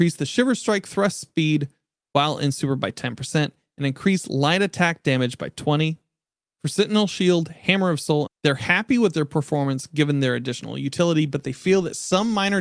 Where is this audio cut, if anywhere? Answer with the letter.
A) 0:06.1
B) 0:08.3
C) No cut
B